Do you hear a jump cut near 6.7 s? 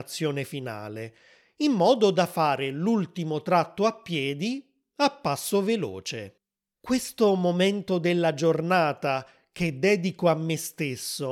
yes; 1 cut; at 6.7 s

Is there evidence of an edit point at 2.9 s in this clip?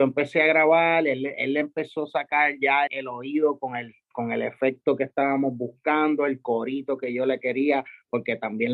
yes; 1 cut; at 2.9 s

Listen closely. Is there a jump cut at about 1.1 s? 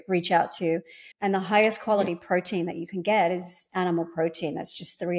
yes; 1 cut; at 1.1 s

